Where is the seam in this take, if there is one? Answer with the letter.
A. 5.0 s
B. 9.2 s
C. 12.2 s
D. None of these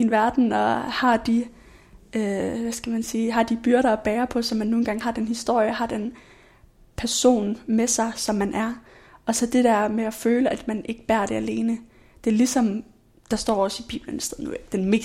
A